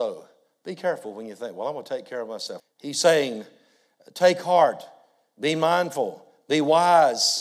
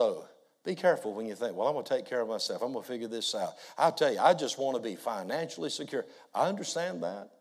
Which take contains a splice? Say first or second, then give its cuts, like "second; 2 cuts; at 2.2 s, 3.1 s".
first; 1 cut; at 2.6 s